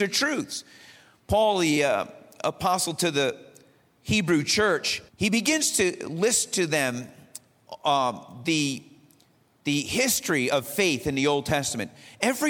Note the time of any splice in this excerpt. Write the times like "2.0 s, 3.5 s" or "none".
5.1 s